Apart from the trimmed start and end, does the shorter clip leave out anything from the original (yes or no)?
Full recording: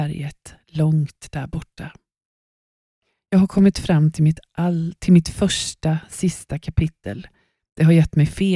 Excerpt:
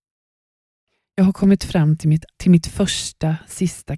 yes